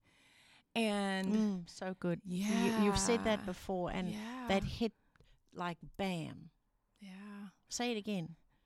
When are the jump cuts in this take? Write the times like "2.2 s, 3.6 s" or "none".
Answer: none